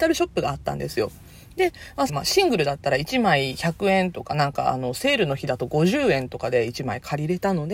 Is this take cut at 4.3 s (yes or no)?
no